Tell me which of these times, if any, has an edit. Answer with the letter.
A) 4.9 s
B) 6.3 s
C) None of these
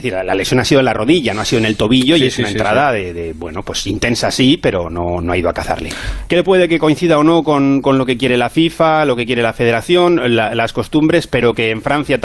B